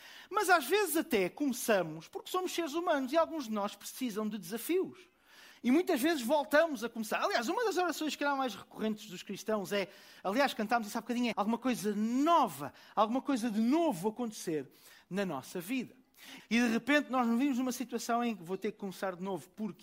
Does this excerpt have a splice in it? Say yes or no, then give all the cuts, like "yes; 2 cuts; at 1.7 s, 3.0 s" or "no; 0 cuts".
yes; 3 cuts; at 5.5 s, 11.3 s, 16.4 s